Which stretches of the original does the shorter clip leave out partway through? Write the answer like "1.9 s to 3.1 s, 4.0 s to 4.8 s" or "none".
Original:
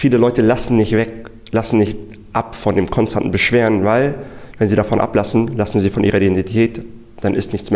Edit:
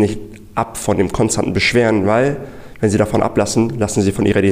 none